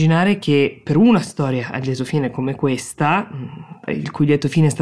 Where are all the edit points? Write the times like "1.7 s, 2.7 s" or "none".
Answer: 3.9 s

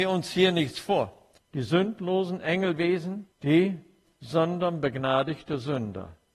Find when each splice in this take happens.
1.4 s, 3.3 s

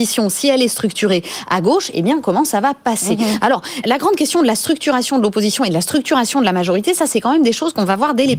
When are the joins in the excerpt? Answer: 3.8 s

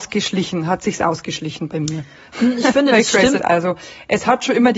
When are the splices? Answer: 3.4 s

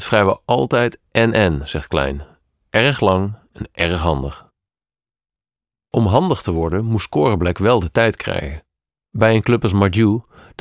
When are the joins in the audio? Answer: none

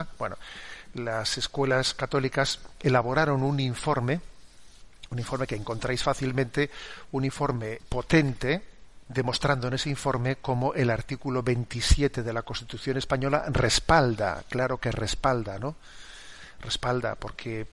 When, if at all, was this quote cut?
7.8 s, 9.0 s

